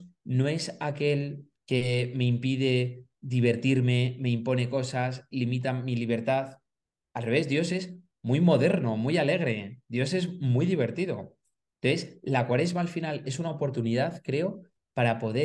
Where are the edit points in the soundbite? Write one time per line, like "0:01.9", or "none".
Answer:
0:11.7